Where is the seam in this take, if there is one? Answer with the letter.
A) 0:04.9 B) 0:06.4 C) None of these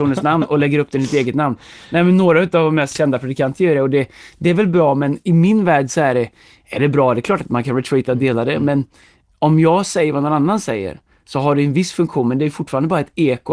C